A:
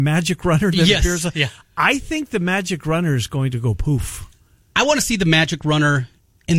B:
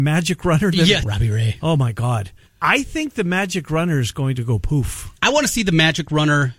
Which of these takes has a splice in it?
B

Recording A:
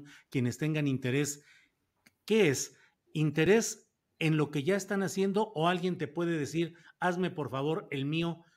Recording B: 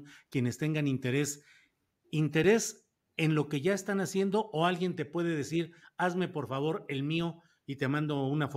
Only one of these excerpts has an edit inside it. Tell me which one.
B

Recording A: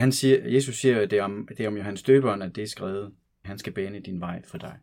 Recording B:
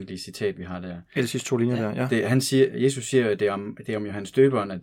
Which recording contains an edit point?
A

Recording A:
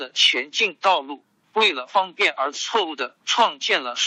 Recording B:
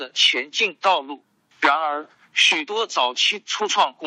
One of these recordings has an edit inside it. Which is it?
A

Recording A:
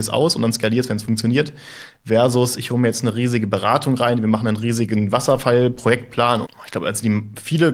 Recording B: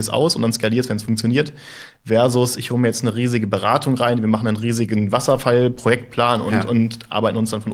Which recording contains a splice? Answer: A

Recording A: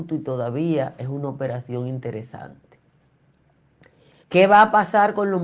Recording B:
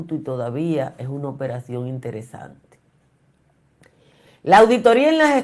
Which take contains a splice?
A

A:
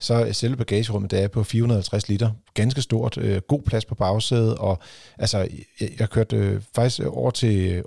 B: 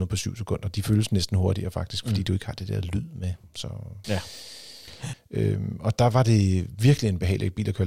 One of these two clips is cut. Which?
B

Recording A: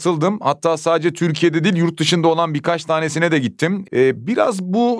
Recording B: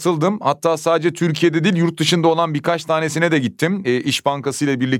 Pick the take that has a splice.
A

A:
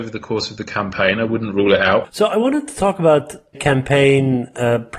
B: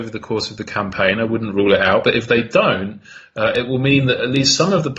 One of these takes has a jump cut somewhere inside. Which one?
A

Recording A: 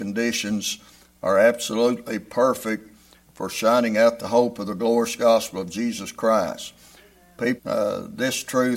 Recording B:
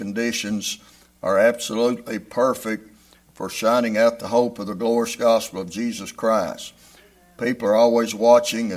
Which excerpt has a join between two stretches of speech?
A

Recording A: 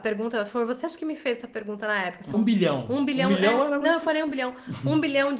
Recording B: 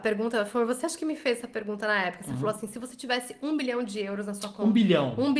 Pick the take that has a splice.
A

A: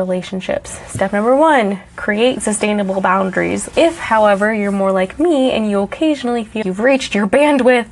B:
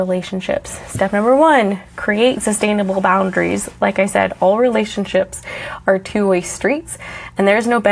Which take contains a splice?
A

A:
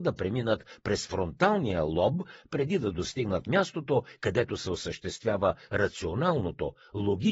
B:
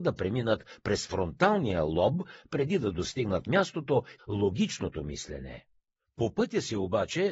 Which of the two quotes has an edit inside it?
B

